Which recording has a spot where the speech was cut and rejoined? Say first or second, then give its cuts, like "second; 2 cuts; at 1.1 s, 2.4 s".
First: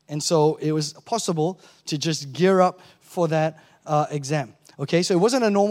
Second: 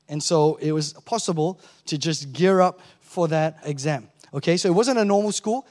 second; 1 cut; at 3.6 s